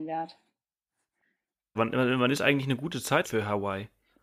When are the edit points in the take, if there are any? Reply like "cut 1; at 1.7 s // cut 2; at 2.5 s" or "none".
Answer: cut 1; at 1.8 s // cut 2; at 3.2 s